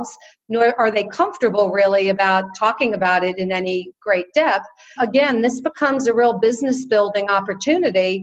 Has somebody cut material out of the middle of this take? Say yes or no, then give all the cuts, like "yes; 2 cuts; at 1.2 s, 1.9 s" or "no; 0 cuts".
yes; 1 cut; at 5.0 s